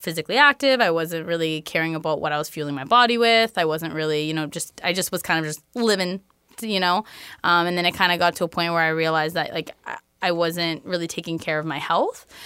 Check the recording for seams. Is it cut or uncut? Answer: uncut